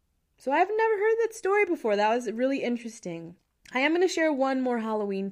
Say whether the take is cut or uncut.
uncut